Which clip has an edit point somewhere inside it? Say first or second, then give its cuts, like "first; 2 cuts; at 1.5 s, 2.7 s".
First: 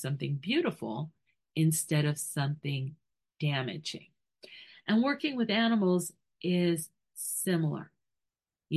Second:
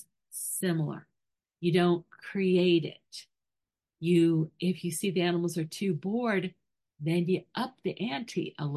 second; 1 cut; at 1.4 s